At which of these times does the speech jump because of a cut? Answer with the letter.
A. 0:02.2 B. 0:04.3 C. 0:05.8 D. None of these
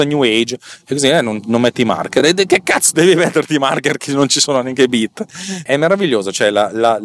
D